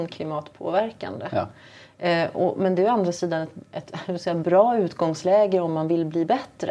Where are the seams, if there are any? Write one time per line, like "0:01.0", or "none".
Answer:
none